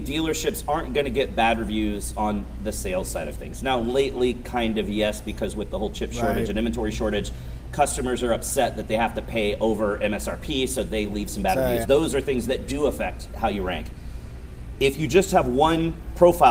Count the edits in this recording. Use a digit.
1